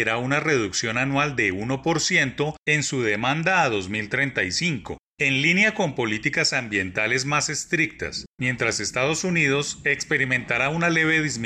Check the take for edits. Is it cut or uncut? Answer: uncut